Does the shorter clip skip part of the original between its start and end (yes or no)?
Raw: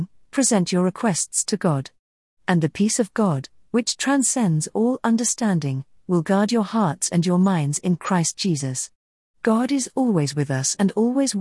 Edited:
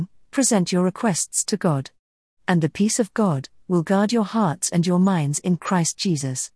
yes